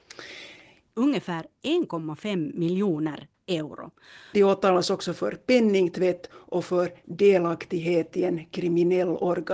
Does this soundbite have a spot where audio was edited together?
yes; 2 cuts; at 0.9 s, 4.3 s

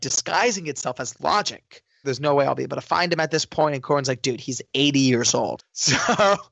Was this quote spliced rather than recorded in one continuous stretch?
yes; 2 cuts; at 2.0 s, 5.6 s

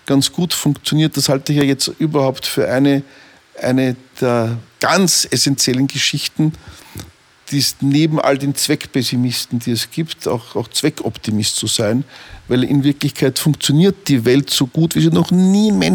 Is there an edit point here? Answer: no; 0 cuts

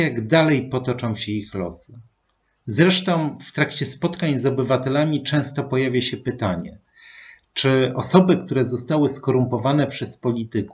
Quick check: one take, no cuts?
yes; 0 cuts

